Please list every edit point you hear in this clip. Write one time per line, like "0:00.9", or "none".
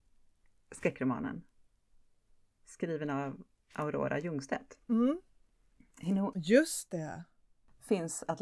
0:04.8
0:06.3